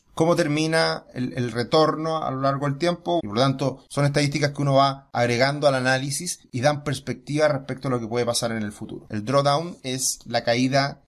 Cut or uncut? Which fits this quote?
cut